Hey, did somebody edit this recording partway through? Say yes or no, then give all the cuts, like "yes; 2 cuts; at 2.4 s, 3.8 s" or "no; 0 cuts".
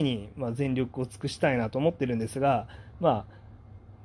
no; 0 cuts